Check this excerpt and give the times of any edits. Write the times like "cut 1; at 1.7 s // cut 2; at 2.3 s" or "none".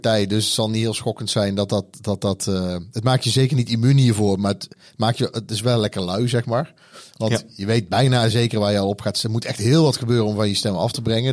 none